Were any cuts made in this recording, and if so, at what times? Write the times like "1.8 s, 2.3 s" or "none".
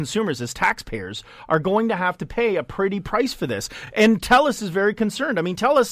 none

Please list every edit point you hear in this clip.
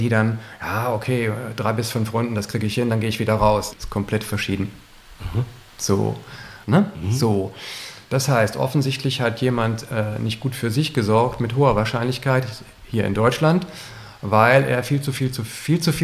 3.7 s, 6.6 s

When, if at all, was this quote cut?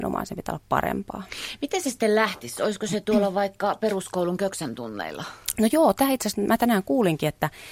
none

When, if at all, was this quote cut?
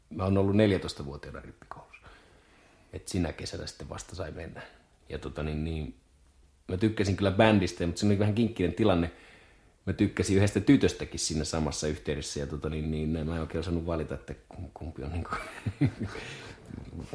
5.0 s

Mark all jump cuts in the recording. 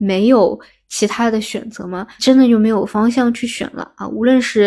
2.2 s

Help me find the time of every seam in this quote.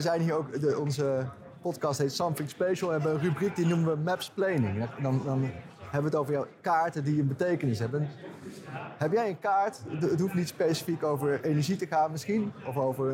none

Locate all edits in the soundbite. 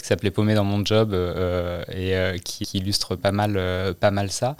2.6 s

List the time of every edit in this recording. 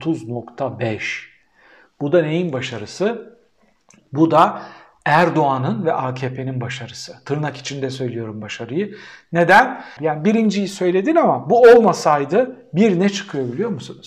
10.0 s

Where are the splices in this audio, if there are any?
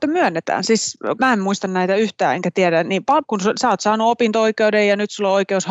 1.2 s, 3.2 s

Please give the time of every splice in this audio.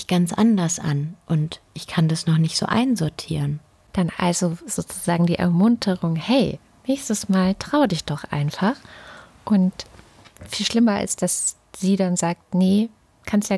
none

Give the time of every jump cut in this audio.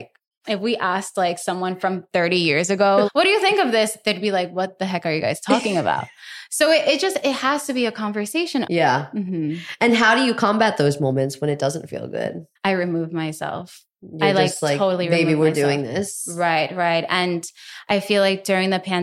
3.0 s, 8.6 s, 12.6 s

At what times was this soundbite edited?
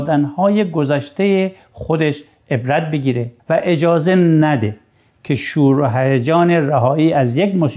3.4 s

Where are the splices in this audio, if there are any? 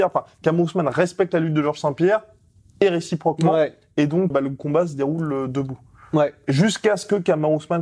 4.3 s

